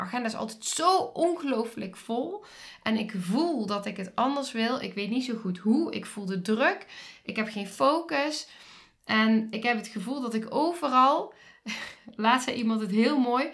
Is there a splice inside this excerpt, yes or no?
no